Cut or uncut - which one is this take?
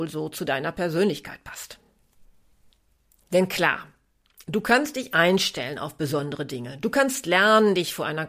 uncut